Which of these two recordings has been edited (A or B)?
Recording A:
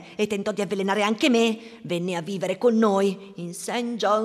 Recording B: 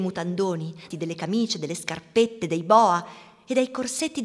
B